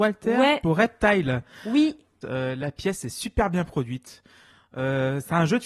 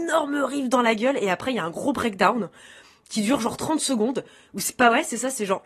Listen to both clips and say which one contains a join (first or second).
first